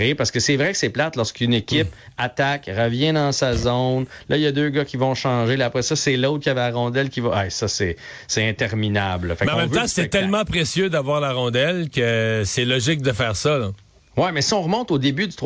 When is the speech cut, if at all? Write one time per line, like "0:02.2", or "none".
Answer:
none